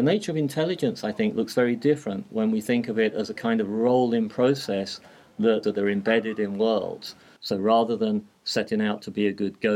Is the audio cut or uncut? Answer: cut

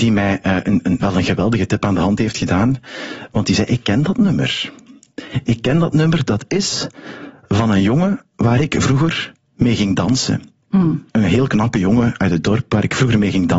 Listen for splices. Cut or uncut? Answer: cut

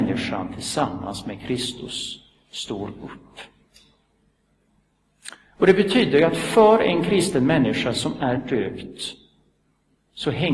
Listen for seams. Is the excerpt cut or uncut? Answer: uncut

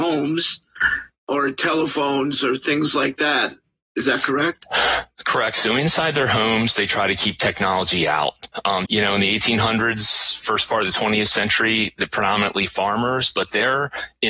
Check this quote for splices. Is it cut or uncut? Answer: cut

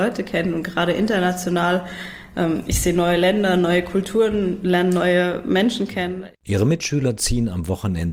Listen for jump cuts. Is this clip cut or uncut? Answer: uncut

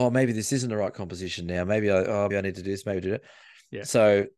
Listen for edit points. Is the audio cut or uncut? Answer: cut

